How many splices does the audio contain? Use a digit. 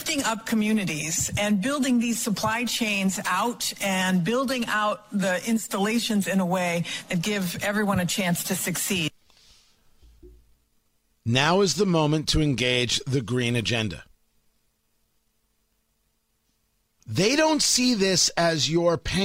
0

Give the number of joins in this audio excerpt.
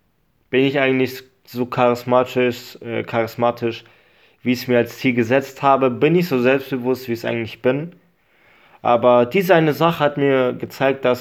0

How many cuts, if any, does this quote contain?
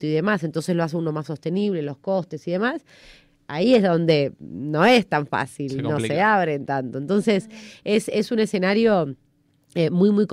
0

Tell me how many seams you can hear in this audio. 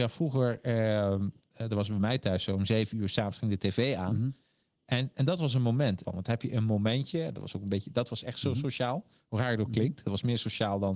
1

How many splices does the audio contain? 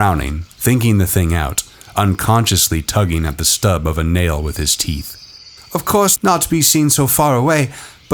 1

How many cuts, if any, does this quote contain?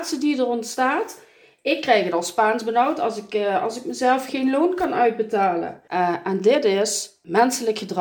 1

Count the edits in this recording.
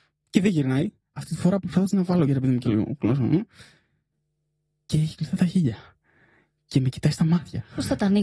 1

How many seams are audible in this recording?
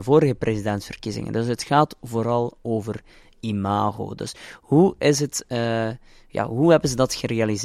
0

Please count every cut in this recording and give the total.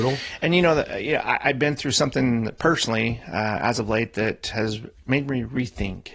1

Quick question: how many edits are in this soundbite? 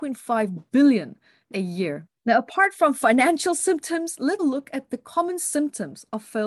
2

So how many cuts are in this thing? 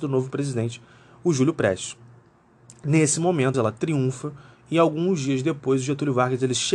1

